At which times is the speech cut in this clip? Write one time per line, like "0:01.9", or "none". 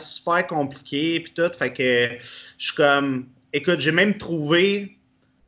none